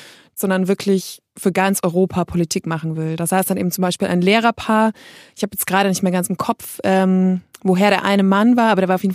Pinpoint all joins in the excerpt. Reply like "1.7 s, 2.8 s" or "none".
none